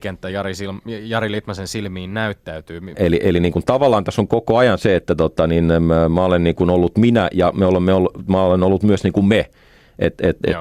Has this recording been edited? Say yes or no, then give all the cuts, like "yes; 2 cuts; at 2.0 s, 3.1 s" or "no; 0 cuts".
yes; 1 cut; at 2.9 s